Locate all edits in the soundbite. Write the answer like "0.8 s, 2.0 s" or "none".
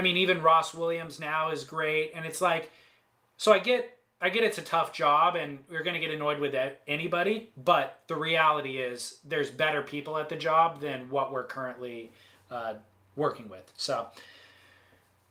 none

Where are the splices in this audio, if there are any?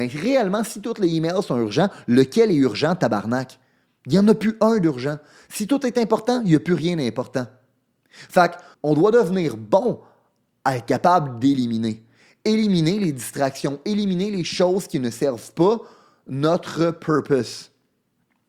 8.7 s

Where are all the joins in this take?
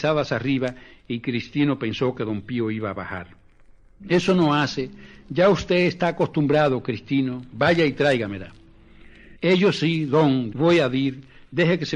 4.0 s, 9.4 s, 10.5 s

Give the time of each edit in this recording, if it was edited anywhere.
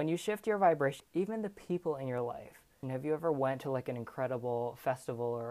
1.0 s, 2.8 s

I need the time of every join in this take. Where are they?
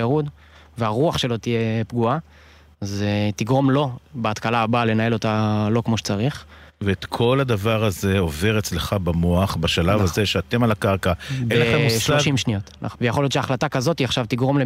12.9 s

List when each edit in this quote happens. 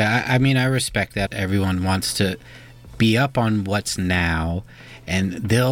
1.3 s

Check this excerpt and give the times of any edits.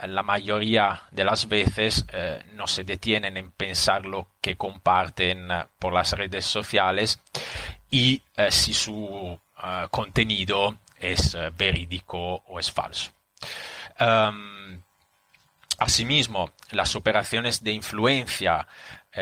none

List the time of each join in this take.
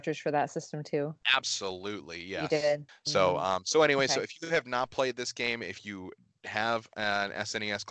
2.9 s

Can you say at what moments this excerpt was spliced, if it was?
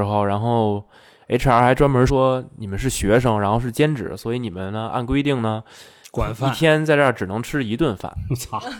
2.1 s

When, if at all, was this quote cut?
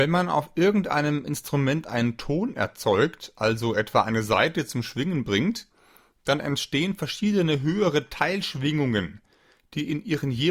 none

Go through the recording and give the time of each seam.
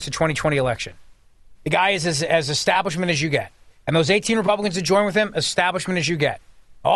1.5 s

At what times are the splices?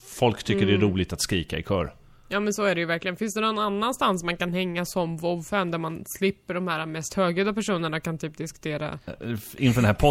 9.1 s

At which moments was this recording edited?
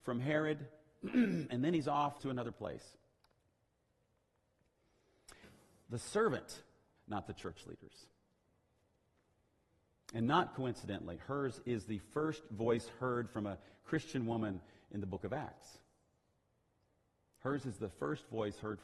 2.2 s, 5.4 s, 7.0 s

